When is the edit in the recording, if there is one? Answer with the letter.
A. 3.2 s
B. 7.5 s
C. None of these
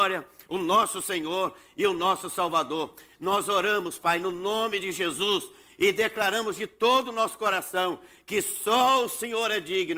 C